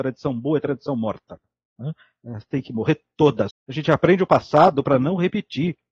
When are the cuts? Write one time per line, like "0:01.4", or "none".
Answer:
0:03.5